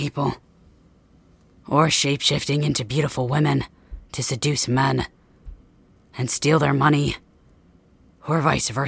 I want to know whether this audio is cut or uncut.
uncut